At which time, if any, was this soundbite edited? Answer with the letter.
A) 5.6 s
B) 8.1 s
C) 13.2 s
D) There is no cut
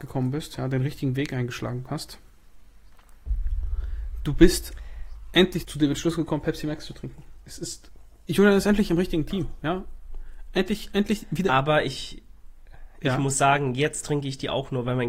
A